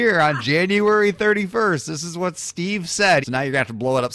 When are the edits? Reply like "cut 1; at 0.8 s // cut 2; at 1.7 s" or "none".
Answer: cut 1; at 3.2 s